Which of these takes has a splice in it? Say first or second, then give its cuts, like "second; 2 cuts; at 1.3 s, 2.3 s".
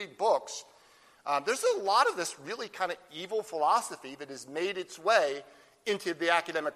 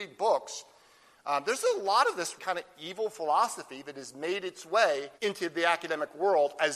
second; 2 cuts; at 2.4 s, 5.1 s